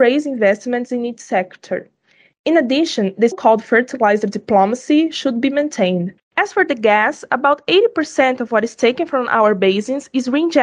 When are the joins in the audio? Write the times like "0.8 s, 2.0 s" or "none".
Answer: 3.3 s, 6.2 s